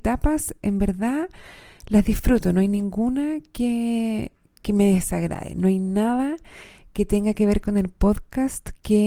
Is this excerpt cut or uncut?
uncut